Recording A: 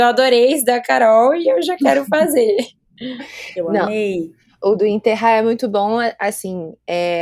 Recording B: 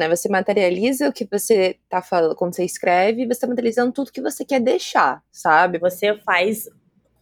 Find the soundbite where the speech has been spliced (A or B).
B